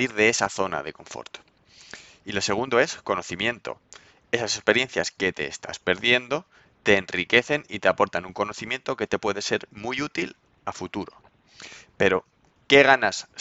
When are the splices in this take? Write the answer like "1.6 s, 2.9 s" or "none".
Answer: none